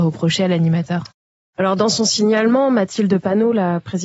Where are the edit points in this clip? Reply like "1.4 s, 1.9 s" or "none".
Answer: none